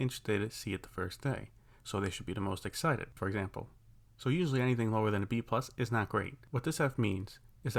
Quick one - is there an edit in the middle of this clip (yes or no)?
yes